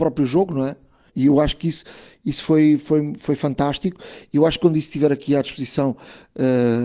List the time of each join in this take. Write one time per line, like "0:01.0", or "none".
0:01.1